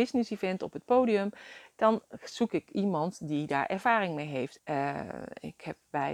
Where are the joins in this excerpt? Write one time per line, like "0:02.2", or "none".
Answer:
0:04.6